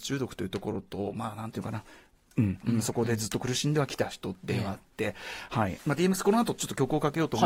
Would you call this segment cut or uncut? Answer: cut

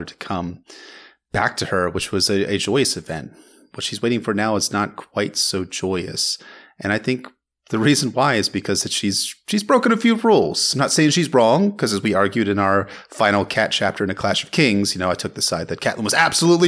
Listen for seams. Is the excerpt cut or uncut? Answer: uncut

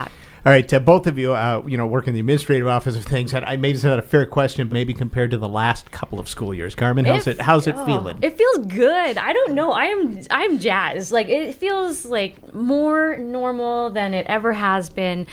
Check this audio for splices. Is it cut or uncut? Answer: cut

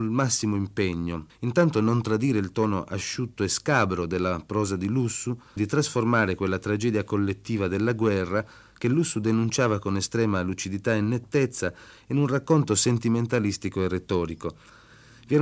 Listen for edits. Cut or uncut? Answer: cut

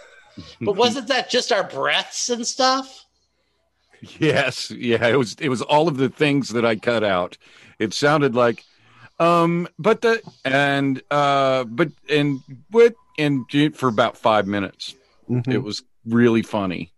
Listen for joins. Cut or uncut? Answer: uncut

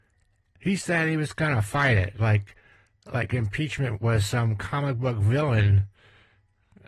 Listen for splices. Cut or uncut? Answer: uncut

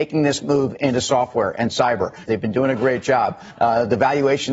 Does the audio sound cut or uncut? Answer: cut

